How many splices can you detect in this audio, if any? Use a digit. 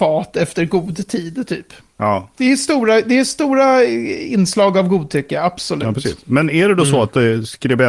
1